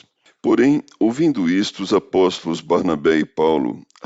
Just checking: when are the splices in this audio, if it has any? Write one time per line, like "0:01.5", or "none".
none